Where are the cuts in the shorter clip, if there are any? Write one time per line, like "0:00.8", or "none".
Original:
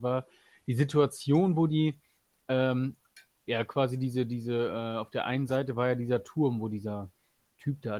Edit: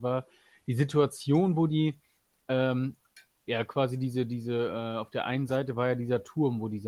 none